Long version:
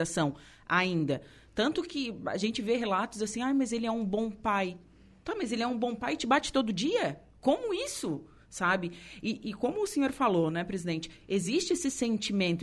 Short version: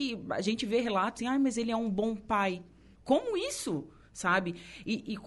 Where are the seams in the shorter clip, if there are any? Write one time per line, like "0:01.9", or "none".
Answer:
0:01.2
0:02.9